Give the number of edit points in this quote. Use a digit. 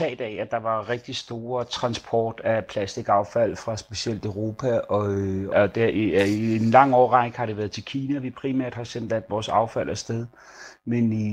1